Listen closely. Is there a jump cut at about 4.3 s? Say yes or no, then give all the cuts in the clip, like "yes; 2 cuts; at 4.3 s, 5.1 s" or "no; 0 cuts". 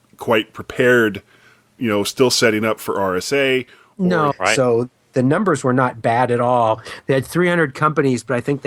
yes; 1 cut; at 4.3 s